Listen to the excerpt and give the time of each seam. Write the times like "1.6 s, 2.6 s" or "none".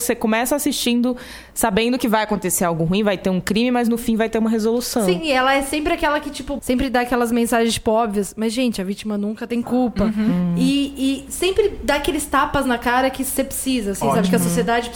6.6 s